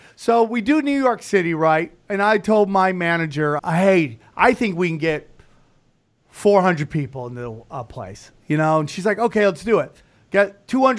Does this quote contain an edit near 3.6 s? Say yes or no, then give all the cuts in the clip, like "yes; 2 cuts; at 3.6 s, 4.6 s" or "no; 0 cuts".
yes; 1 cut; at 3.6 s